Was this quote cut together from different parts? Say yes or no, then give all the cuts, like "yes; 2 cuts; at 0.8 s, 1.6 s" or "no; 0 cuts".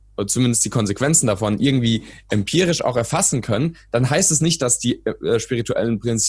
no; 0 cuts